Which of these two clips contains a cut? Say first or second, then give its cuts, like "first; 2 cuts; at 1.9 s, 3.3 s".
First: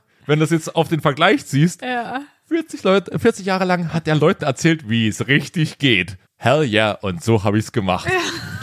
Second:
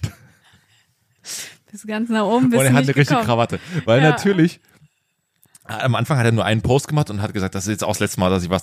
first; 1 cut; at 6.3 s